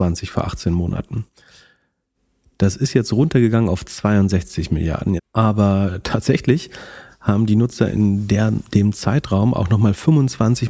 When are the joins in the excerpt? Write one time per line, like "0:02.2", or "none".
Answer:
0:05.2